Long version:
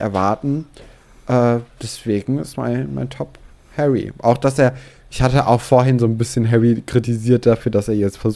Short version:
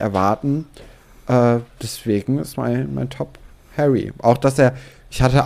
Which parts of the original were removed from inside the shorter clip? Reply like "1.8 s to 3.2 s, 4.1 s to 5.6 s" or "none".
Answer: none